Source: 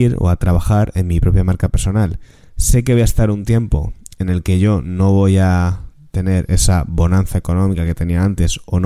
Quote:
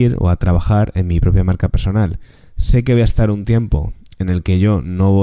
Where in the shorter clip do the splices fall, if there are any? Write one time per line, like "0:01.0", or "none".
none